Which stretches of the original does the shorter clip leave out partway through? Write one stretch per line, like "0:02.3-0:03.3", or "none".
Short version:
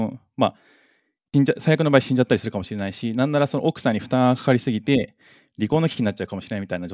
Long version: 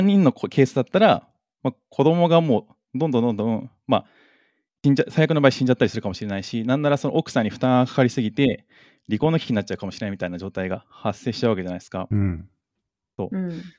none